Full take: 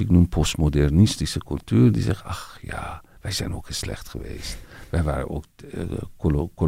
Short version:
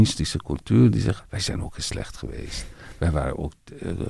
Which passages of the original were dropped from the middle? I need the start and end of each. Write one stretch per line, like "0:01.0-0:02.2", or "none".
0:02.2-0:03.1